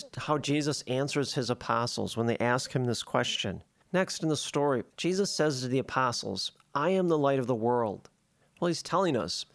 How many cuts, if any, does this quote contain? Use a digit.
3